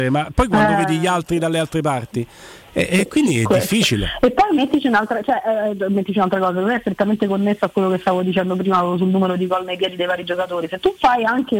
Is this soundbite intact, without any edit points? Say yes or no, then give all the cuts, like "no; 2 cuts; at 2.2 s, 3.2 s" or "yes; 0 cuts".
yes; 0 cuts